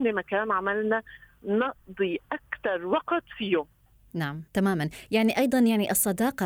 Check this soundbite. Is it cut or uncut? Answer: cut